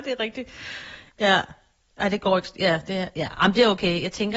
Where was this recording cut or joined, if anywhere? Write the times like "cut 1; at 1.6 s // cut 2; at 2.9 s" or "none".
none